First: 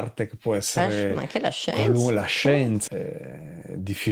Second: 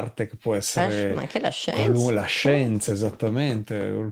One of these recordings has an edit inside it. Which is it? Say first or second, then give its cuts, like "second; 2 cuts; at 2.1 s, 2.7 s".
first; 1 cut; at 2.9 s